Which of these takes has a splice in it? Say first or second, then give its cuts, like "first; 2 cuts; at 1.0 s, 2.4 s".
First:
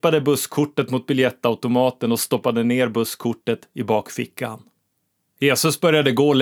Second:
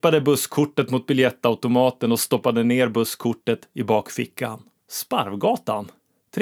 second; 1 cut; at 4.8 s